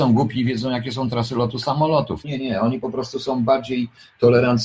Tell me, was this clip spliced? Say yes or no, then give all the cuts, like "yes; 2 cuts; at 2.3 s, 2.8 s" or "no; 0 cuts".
yes; 1 cut; at 2.2 s